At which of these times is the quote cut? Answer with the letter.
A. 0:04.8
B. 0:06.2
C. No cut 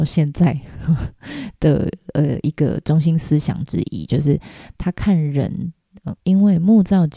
B